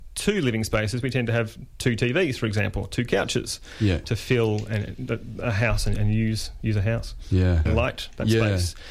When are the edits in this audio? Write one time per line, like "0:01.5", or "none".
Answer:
0:04.0
0:07.7